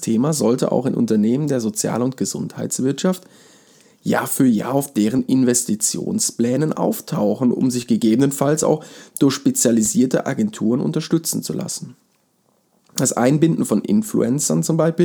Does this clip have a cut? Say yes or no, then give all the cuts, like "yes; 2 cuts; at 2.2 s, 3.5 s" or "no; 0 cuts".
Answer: no; 0 cuts